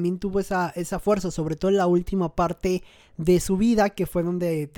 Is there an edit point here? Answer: no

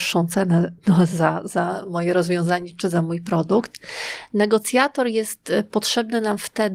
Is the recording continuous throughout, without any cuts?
yes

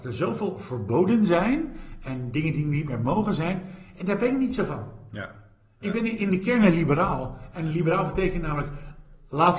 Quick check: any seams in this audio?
no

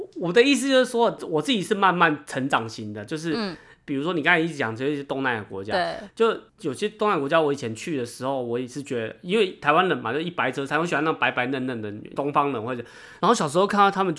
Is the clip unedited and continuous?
yes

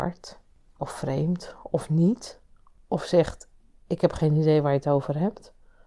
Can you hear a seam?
no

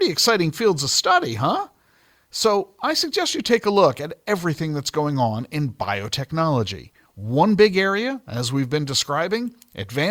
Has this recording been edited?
no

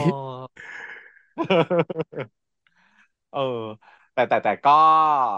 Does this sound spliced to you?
no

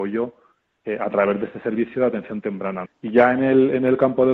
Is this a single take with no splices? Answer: no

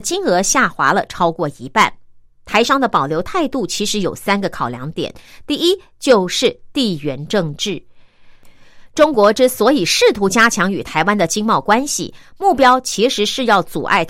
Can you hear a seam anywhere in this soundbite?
no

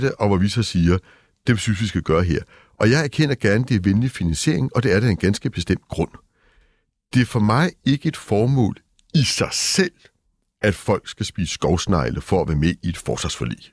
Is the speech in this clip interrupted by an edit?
no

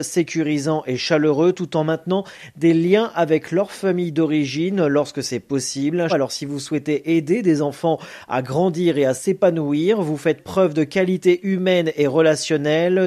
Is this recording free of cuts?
no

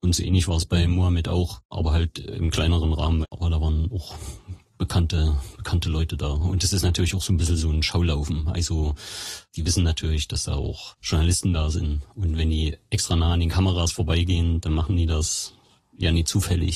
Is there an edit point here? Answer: yes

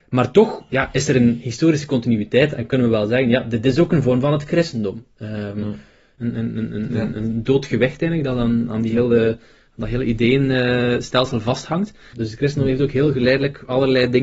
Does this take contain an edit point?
yes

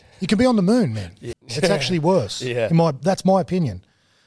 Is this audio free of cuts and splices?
no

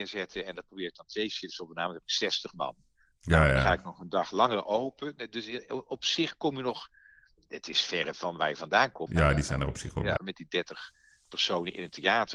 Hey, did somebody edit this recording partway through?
yes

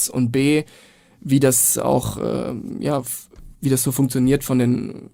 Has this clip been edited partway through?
no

